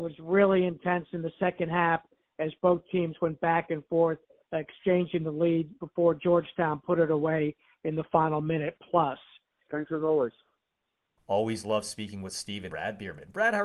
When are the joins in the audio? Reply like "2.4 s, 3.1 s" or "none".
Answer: 9.7 s, 12.7 s